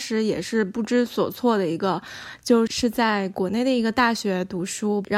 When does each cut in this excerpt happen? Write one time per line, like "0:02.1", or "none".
0:02.7